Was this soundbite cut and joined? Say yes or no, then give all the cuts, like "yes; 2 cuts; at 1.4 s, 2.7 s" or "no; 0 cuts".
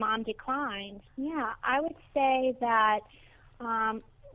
yes; 1 cut; at 1.1 s